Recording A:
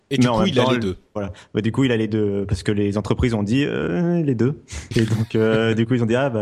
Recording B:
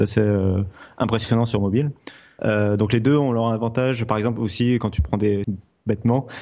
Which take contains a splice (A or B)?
B